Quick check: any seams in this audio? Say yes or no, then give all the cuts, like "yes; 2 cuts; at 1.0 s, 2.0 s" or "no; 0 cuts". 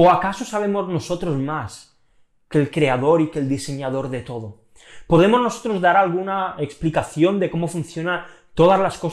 no; 0 cuts